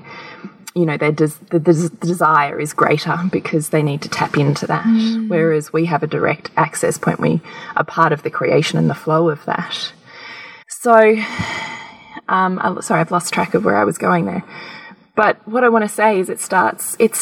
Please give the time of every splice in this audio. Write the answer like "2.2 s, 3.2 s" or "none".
10.6 s